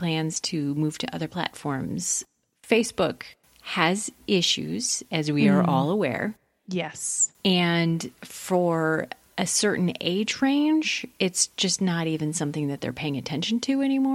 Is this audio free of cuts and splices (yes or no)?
yes